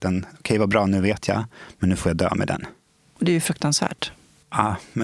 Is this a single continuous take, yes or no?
yes